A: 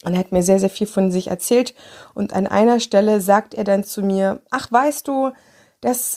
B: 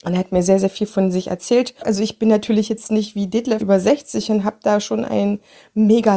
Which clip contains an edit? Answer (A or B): B